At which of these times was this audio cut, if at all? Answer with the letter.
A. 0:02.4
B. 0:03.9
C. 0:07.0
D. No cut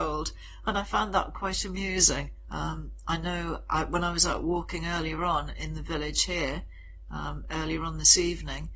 A